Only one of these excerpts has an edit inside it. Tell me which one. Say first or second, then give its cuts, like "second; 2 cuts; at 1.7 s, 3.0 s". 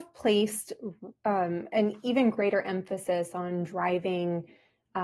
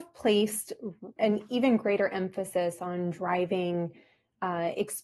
second; 1 cut; at 1.2 s